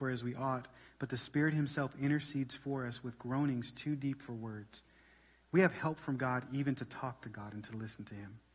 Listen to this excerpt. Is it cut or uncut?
uncut